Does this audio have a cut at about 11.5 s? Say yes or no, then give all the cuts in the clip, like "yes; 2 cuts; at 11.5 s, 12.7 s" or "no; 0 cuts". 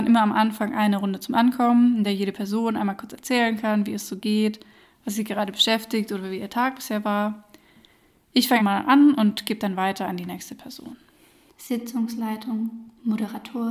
yes; 2 cuts; at 8.6 s, 11.5 s